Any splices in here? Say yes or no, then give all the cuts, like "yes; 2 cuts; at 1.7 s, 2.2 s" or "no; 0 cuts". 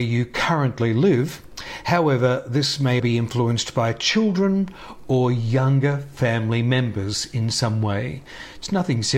yes; 1 cut; at 3.0 s